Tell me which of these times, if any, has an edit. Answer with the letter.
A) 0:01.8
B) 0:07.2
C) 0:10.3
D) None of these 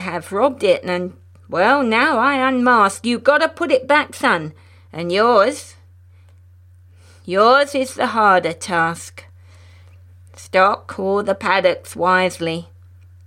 D